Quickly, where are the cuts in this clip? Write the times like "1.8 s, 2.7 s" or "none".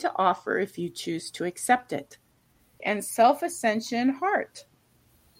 2.8 s

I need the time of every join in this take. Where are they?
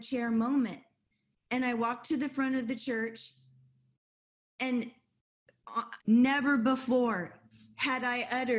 6.0 s

